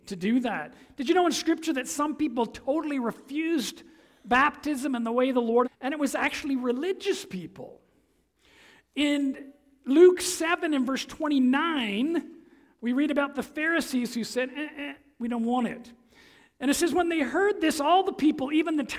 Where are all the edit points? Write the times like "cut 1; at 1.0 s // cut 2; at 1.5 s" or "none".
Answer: cut 1; at 5.6 s